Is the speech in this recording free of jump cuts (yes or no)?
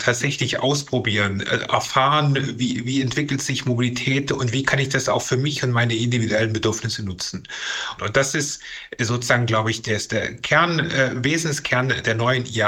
no